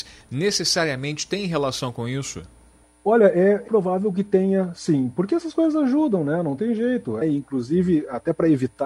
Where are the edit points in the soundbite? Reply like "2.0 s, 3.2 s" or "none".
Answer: 3.7 s, 7.2 s

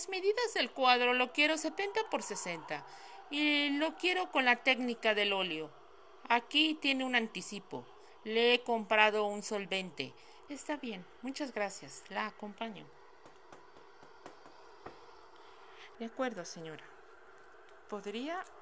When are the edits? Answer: 10.5 s, 15.9 s

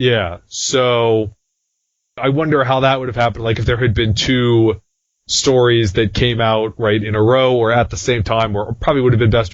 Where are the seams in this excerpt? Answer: none

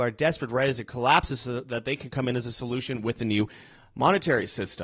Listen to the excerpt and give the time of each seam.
none

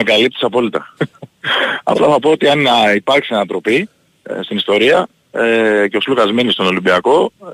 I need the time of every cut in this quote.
1.0 s

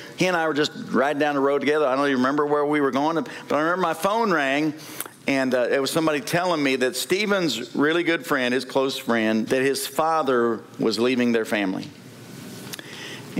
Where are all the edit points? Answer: 9.5 s

